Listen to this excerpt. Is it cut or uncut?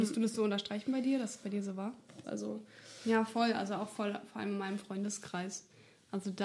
cut